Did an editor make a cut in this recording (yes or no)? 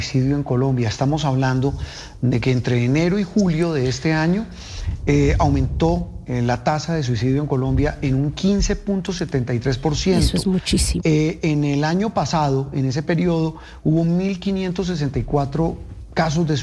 yes